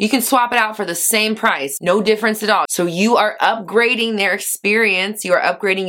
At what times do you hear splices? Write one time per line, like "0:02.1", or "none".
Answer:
0:02.6